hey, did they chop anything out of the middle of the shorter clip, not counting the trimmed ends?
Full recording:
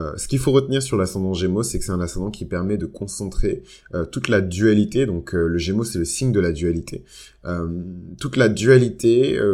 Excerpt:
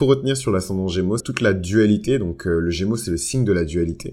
yes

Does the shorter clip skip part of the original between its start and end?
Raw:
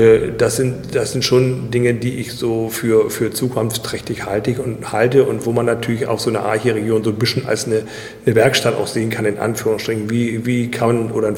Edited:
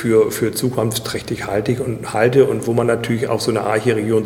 no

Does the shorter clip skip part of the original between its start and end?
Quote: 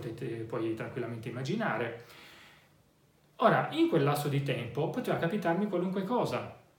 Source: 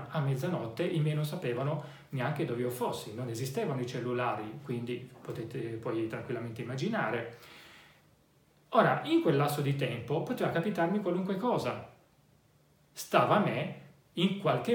no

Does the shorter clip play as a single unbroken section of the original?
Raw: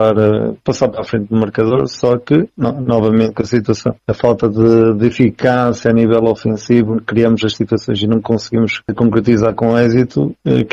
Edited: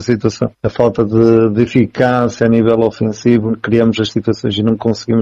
yes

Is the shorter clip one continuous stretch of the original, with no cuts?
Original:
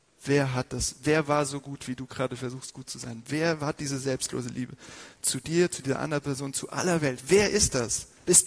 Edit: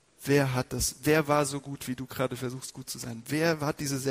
yes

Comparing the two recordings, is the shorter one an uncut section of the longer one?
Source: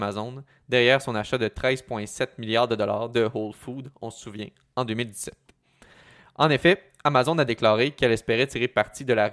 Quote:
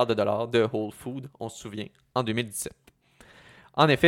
yes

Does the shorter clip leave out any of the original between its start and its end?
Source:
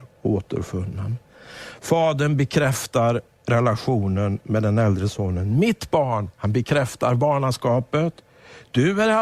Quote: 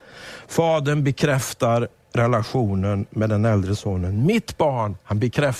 no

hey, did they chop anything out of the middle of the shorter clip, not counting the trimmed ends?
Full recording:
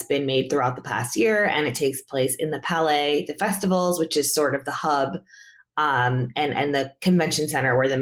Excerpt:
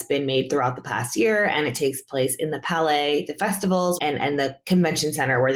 yes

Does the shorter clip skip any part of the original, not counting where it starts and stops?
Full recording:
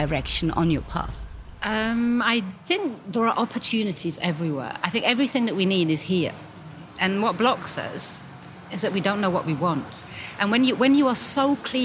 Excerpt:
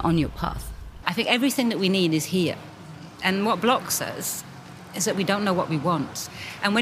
yes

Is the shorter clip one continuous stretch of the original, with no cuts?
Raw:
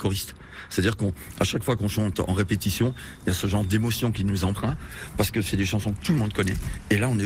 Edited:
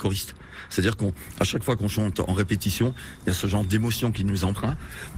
yes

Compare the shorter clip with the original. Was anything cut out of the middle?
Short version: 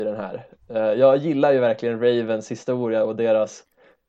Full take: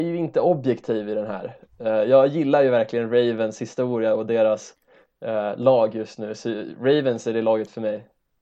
no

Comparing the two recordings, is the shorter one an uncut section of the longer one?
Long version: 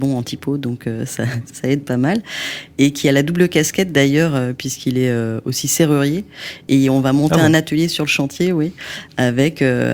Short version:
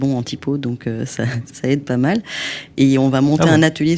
no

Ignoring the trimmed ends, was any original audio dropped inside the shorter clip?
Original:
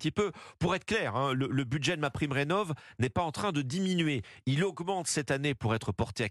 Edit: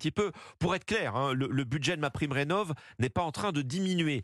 no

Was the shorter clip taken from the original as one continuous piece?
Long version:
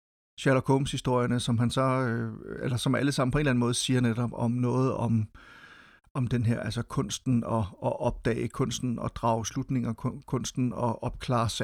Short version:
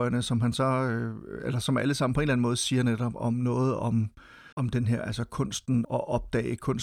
no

